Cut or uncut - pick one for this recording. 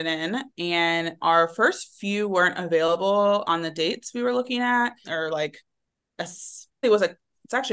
cut